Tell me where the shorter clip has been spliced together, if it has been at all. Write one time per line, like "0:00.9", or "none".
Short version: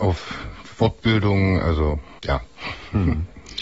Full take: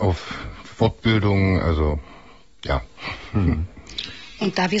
0:02.2